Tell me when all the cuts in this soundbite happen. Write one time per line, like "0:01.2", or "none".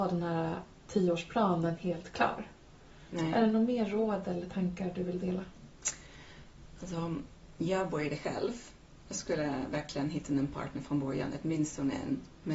0:09.0